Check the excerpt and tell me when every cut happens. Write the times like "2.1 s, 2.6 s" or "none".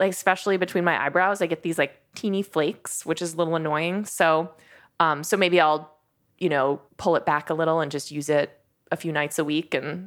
6.9 s